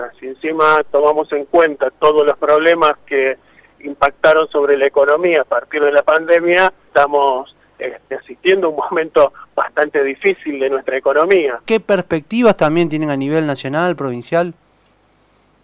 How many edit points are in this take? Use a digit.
2